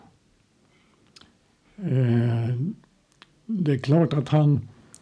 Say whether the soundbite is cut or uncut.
cut